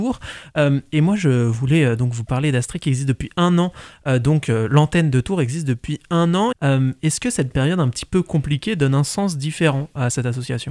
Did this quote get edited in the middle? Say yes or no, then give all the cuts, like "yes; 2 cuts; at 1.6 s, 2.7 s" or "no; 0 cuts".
yes; 1 cut; at 6.5 s